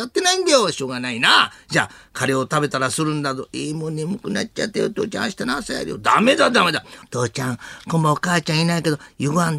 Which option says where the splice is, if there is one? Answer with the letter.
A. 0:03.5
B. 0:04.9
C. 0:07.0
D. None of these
C